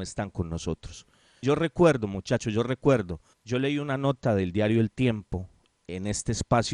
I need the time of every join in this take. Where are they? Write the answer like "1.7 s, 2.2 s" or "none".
1.4 s, 3.3 s